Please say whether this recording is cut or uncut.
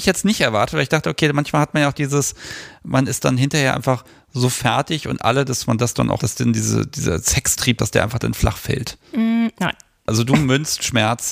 cut